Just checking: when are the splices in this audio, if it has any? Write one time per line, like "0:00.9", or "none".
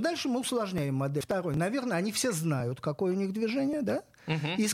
0:01.2